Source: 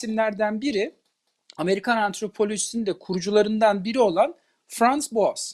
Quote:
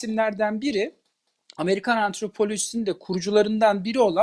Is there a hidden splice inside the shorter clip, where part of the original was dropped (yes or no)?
no